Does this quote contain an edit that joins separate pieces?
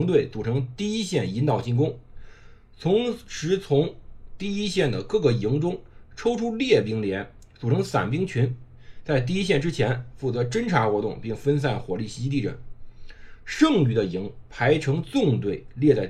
no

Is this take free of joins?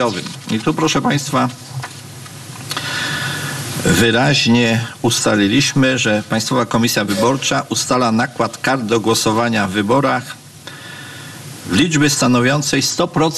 yes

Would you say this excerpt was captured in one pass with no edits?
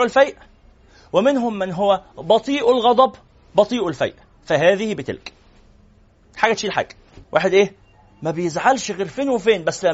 no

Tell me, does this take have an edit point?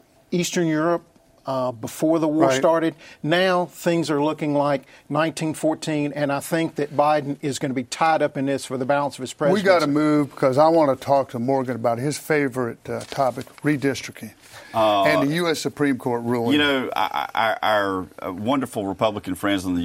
no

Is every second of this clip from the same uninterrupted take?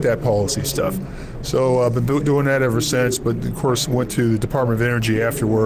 yes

